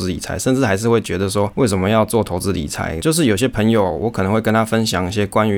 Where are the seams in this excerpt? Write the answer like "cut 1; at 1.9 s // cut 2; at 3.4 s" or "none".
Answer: cut 1; at 3.0 s

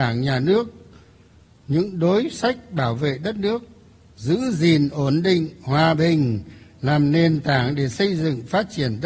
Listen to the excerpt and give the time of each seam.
none

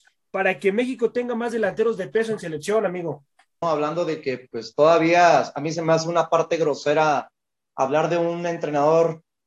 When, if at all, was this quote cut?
cut 1; at 3.6 s

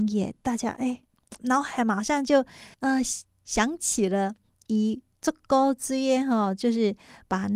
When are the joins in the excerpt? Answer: cut 1; at 1.4 s // cut 2; at 2.7 s

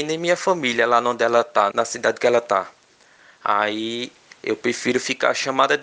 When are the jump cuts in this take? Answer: cut 1; at 1.7 s

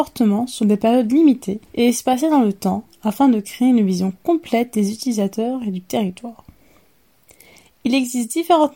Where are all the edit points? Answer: cut 1; at 1.7 s

